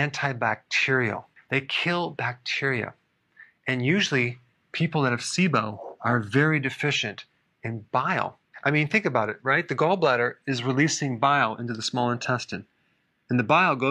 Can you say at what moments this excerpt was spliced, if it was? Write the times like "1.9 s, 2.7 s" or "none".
none